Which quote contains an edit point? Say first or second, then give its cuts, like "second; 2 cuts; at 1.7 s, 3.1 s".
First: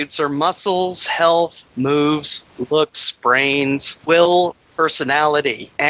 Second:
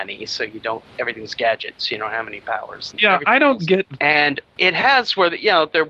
second; 2 cuts; at 2.9 s, 4.0 s